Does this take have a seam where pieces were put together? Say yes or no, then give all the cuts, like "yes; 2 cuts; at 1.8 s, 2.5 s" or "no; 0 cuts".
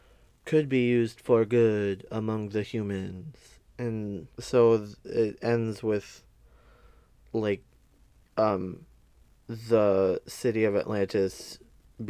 yes; 1 cut; at 4.3 s